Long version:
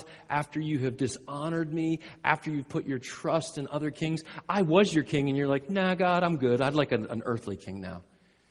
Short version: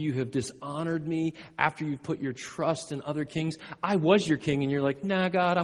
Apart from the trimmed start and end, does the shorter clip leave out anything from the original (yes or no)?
no